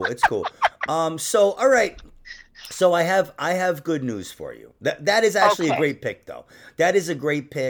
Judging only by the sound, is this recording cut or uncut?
uncut